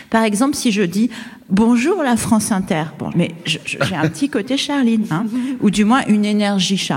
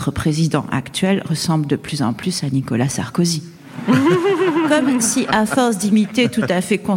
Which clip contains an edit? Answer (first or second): first